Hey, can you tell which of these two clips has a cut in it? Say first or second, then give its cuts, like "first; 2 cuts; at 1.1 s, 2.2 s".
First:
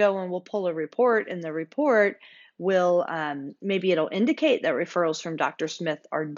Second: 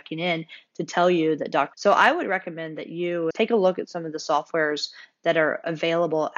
second; 2 cuts; at 1.7 s, 3.3 s